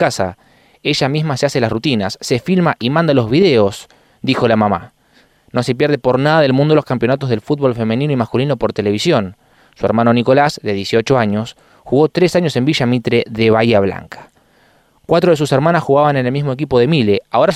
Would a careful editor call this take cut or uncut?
uncut